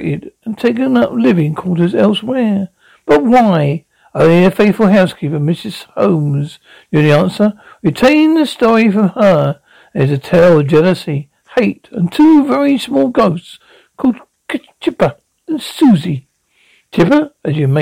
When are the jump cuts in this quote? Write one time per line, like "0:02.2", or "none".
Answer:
none